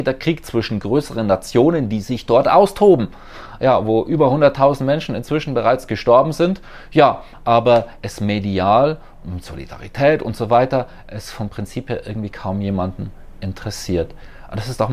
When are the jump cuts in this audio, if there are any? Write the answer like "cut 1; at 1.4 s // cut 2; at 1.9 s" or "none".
none